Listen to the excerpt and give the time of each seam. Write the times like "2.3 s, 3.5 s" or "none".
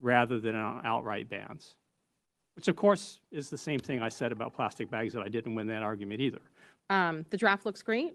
6.8 s